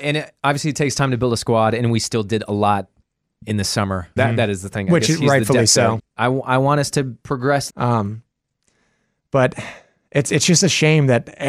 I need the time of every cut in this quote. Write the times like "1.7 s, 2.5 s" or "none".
4.2 s, 6.0 s, 7.7 s